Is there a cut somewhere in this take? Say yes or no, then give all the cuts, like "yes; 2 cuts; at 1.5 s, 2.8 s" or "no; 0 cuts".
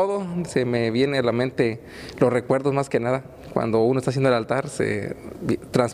no; 0 cuts